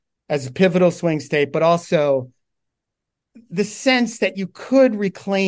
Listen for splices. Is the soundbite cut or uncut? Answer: uncut